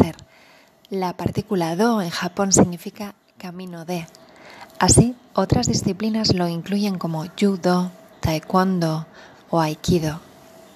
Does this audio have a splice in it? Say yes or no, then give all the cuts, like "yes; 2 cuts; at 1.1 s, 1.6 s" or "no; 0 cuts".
no; 0 cuts